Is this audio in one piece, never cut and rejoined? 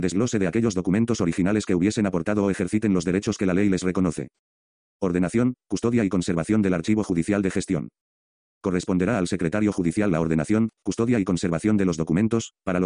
yes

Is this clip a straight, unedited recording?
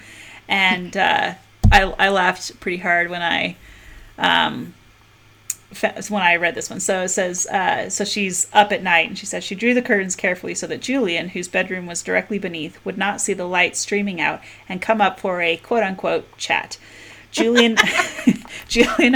yes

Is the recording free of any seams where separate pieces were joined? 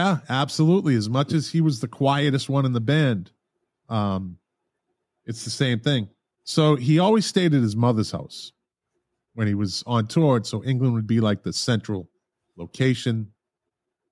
no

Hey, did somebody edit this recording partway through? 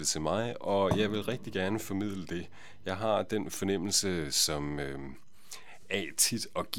no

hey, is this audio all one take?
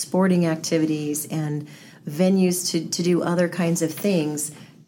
yes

